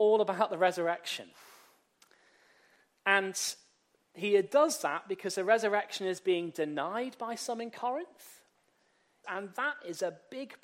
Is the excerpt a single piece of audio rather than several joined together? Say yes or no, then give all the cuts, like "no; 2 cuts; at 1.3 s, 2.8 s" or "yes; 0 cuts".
no; 1 cut; at 9.2 s